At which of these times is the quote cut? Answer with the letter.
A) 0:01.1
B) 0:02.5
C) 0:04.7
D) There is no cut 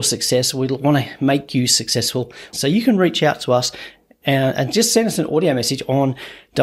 B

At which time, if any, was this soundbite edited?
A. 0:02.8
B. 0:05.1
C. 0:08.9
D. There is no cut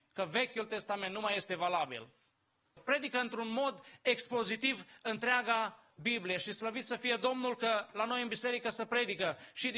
A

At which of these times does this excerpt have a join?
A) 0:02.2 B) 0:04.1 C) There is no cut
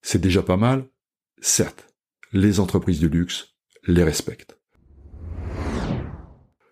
A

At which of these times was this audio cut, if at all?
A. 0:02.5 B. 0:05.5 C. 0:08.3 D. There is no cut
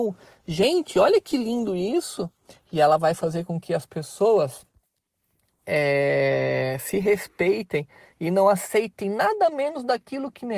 A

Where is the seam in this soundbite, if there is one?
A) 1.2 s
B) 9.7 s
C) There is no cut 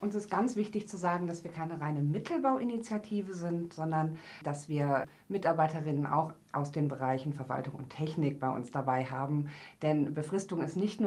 C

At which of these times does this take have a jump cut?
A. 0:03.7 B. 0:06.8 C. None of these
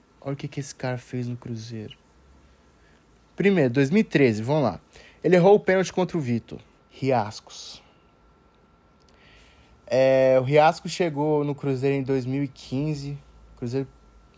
B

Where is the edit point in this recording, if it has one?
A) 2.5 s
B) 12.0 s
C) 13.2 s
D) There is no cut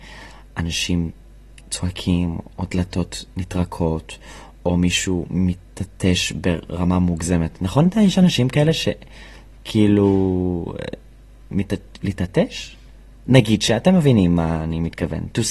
B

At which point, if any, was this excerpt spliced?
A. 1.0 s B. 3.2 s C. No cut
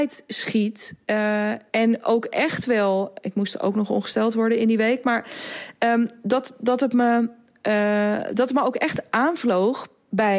C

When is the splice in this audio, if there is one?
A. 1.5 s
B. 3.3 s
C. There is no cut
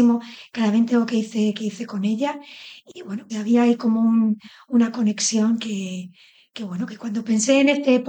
B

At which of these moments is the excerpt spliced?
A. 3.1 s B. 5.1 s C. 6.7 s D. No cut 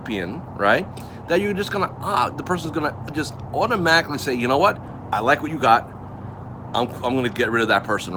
D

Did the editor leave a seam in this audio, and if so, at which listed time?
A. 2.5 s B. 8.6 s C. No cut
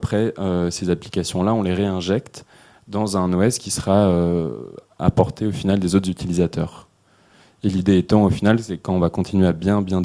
C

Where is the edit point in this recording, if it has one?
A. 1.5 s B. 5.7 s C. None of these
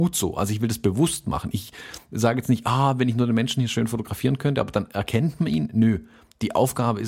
C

